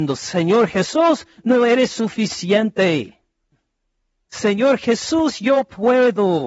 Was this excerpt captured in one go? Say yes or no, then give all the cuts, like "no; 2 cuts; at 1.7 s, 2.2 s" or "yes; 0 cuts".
yes; 0 cuts